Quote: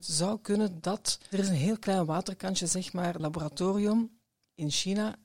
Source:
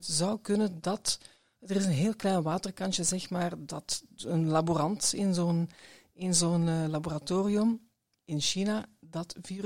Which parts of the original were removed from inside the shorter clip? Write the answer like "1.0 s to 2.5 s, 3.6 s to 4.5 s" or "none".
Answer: 1.3 s to 1.7 s, 3.6 s to 6.9 s